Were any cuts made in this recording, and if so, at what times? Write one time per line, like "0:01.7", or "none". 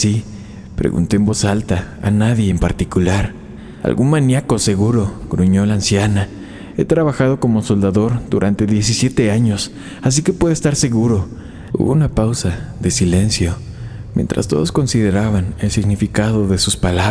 0:06.7
0:11.7